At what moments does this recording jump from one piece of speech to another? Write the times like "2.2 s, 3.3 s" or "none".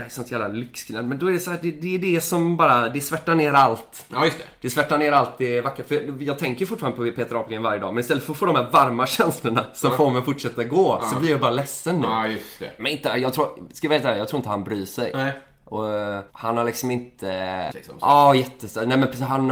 12.8 s, 16.3 s, 17.7 s